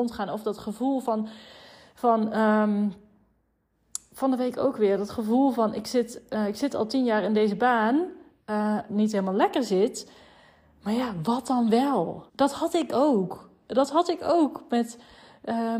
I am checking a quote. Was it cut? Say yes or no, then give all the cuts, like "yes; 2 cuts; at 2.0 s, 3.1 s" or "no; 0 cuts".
yes; 2 cuts; at 8.9 s, 12.3 s